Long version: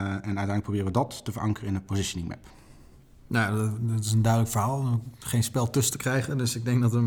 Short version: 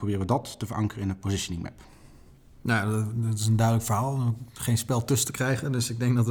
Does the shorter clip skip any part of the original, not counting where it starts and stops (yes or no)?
no